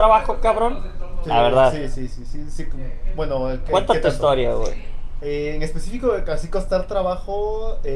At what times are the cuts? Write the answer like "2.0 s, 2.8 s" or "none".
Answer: none